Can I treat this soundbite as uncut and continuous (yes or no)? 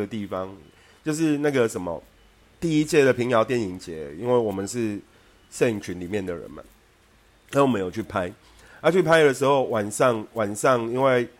yes